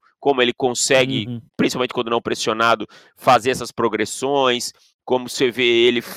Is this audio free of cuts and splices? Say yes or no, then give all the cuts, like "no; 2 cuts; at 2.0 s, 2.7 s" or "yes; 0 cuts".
no; 1 cut; at 1.5 s